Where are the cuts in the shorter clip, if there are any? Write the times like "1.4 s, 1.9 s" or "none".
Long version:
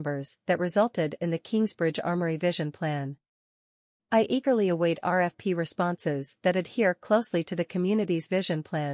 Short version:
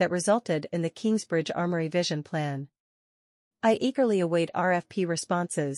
none